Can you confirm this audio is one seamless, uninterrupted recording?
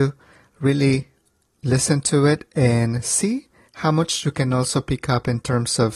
yes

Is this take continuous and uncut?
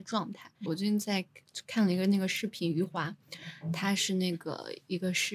yes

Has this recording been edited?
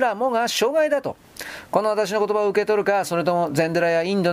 no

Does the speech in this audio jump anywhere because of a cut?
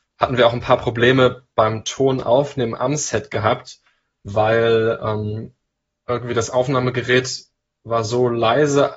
no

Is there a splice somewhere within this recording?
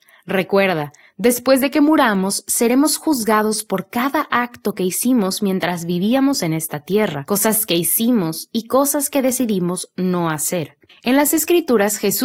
yes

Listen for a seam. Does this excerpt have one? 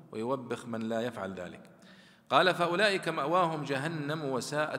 no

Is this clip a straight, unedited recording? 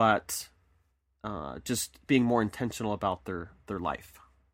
no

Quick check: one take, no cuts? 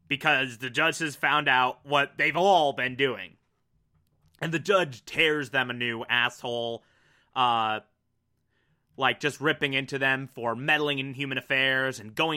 yes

